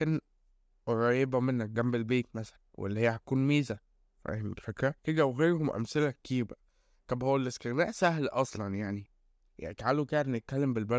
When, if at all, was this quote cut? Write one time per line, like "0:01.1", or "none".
0:05.0